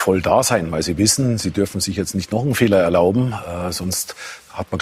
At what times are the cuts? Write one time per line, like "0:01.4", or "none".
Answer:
none